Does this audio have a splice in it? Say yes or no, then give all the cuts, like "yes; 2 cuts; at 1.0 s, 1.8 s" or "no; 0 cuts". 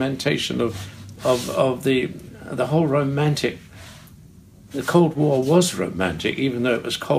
no; 0 cuts